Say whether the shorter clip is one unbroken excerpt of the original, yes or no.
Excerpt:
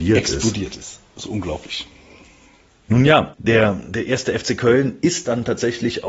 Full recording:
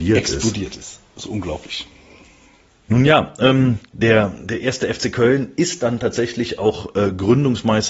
no